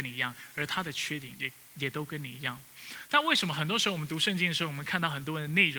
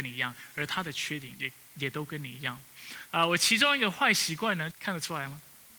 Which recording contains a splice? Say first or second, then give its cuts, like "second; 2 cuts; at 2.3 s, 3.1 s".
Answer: second; 2 cuts; at 3.1 s, 4.7 s